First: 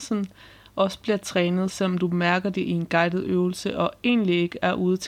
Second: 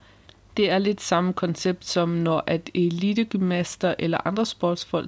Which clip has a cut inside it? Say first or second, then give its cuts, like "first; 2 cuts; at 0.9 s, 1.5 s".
first; 1 cut; at 1.7 s